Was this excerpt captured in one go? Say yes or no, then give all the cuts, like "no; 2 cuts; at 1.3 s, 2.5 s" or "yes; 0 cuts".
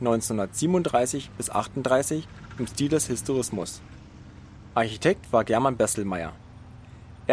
yes; 0 cuts